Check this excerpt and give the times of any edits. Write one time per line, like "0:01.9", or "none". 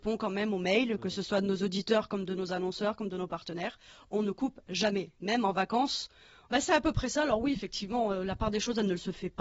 0:06.5